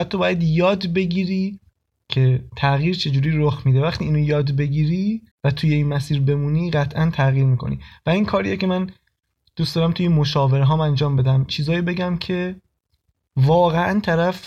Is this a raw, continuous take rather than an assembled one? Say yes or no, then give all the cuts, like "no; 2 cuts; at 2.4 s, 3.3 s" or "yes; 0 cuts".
no; 1 cut; at 5.3 s